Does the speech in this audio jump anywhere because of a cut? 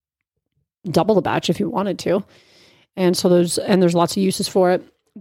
no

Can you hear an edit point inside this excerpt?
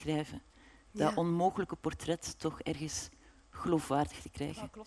no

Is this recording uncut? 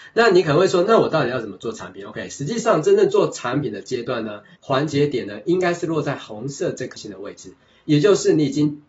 no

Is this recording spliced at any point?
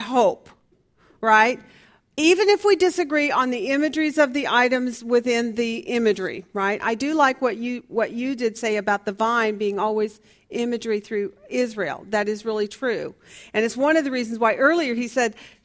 yes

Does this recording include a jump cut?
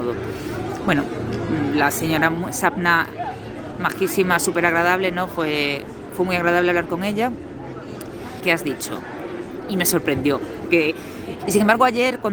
yes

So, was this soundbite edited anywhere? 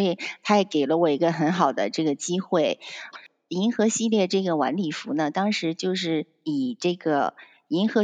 yes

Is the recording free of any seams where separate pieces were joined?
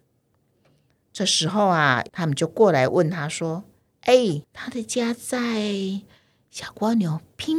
no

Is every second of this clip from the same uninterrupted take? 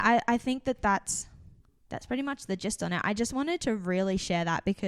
yes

